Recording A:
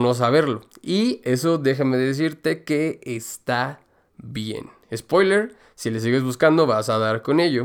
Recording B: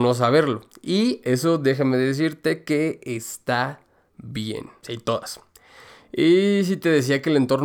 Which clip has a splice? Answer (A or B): B